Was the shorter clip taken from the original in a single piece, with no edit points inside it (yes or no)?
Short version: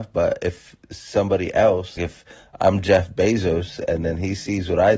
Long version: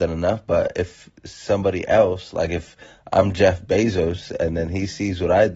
no